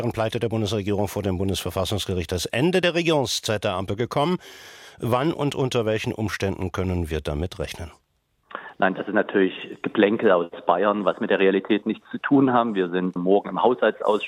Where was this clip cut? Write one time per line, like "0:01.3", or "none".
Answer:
0:13.2